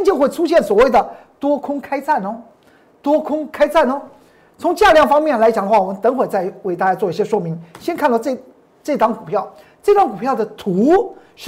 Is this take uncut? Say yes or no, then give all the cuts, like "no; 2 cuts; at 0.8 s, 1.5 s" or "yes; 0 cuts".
yes; 0 cuts